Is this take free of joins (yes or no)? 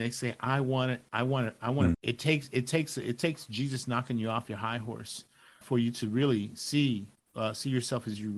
no